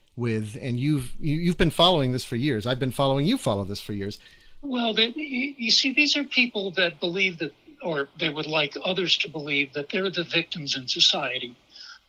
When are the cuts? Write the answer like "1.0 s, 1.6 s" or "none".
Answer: 4.6 s